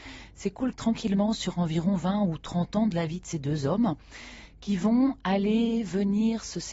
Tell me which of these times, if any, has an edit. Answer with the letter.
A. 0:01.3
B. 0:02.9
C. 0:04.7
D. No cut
D